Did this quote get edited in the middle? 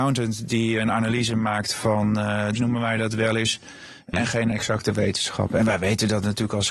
yes; 2 cuts; at 2.5 s, 4.1 s

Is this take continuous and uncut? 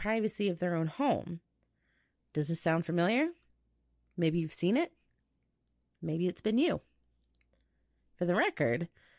yes; 0 cuts

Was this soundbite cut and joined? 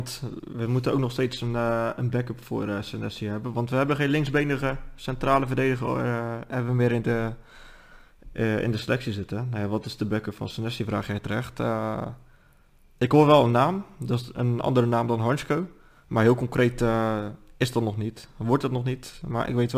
no; 0 cuts

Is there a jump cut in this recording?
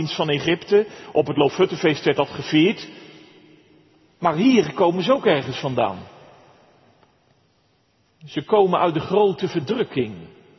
no; 0 cuts

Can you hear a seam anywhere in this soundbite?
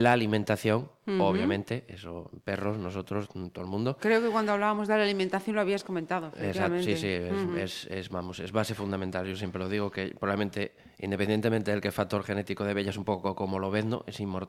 no; 0 cuts

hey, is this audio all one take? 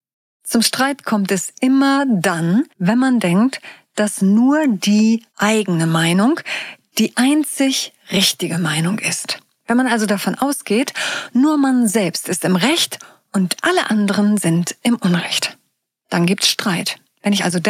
no; 2 cuts; at 2.7 s, 5.3 s

